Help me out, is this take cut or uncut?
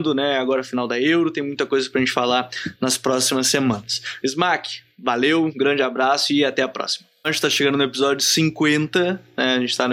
cut